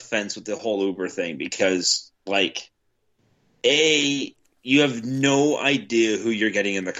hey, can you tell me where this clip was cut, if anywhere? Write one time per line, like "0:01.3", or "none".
none